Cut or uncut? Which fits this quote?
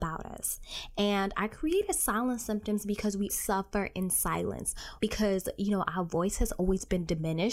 cut